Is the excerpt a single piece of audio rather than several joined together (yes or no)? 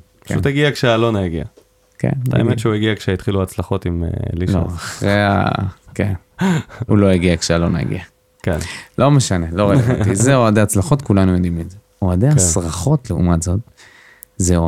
no